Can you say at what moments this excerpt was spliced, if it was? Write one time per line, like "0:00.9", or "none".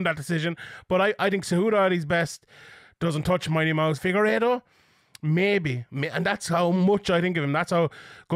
0:04.0